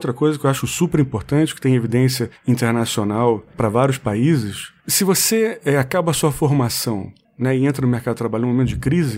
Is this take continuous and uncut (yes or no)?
yes